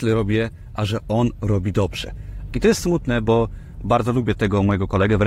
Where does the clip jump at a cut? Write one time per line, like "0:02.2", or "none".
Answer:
0:02.5